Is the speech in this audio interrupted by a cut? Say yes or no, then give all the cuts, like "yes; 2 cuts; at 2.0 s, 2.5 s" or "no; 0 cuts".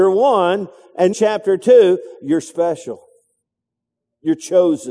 yes; 1 cut; at 1.1 s